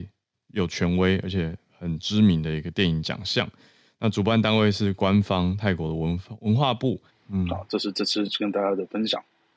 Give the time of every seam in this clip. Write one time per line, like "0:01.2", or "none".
0:07.1